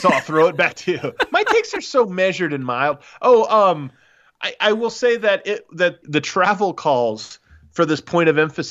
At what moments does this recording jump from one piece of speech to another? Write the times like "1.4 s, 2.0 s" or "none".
6.0 s